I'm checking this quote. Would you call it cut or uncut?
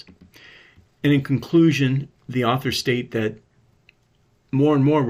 cut